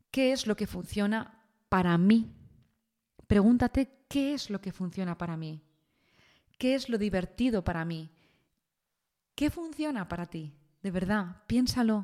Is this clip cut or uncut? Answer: uncut